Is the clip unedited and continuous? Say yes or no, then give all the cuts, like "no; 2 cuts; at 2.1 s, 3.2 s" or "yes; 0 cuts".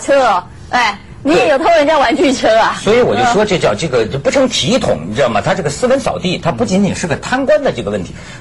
yes; 0 cuts